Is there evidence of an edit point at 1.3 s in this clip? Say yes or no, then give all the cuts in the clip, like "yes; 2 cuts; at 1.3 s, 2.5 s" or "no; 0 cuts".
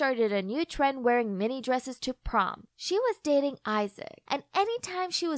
no; 2 cuts; at 2.7 s, 4.3 s